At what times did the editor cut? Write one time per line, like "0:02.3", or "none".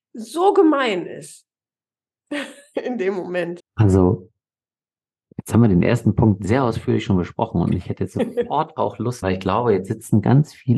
0:03.6
0:09.2